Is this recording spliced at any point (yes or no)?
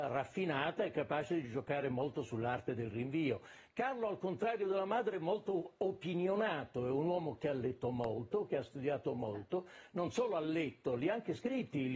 no